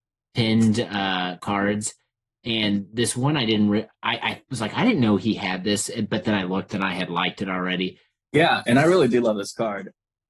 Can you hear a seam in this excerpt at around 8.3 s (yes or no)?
yes